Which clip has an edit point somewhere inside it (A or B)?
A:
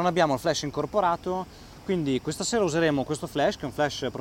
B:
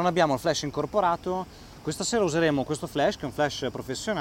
B